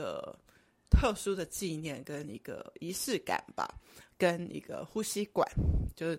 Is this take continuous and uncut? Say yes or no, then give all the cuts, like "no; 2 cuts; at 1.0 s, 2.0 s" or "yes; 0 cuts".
no; 1 cut; at 4.1 s